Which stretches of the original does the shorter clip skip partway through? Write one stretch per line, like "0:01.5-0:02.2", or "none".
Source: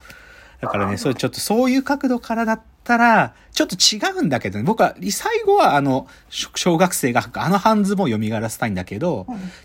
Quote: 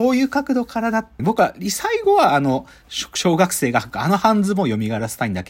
0:02.7-0:04.6